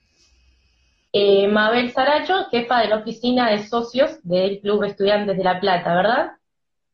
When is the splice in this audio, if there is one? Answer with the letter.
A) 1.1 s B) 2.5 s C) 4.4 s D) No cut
A